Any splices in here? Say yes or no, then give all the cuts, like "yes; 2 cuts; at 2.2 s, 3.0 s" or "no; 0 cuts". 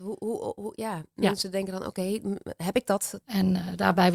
yes; 1 cut; at 3.2 s